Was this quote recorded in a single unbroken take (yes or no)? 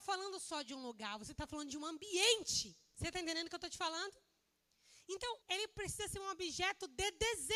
no